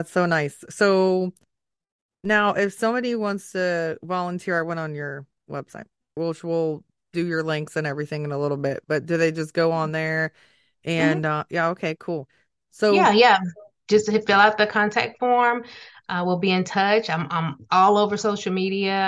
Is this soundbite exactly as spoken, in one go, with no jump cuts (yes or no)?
no